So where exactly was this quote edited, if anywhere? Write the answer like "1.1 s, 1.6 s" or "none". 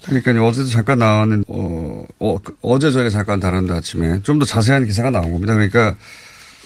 1.4 s